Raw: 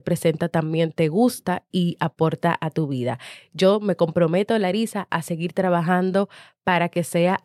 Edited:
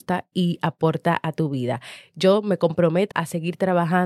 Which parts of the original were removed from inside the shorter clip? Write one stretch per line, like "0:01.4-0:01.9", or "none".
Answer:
0:04.5-0:05.1